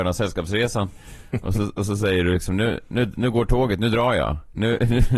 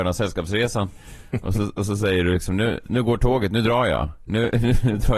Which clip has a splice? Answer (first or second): second